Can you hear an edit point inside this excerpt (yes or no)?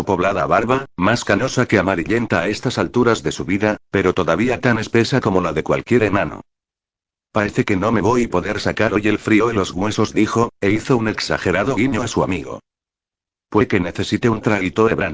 no